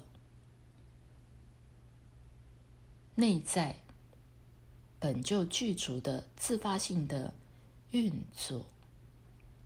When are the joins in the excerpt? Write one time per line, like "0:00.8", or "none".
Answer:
none